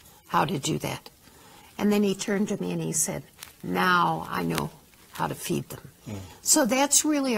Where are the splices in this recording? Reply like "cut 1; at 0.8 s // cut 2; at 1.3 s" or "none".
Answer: none